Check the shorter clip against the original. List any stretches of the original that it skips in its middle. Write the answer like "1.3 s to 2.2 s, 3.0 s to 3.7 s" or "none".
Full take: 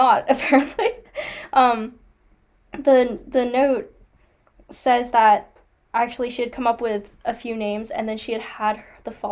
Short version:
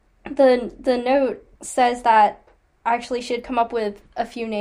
4.0 s to 4.6 s